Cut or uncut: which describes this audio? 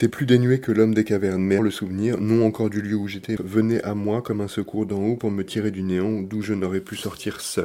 cut